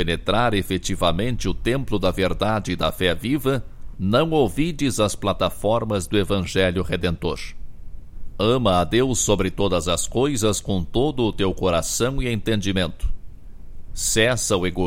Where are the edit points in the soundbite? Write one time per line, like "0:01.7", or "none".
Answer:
0:03.9
0:13.9